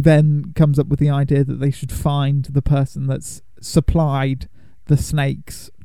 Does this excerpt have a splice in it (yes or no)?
no